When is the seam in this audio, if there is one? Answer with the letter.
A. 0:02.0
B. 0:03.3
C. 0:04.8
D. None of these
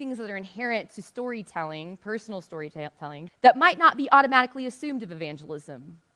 B